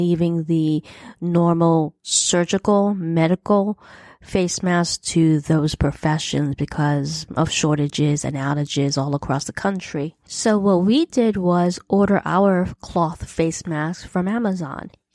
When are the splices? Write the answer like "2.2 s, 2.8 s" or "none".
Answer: none